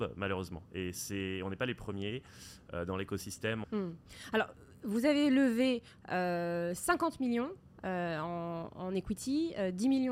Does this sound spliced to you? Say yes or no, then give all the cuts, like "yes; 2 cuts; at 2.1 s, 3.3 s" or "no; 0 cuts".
yes; 1 cut; at 3.6 s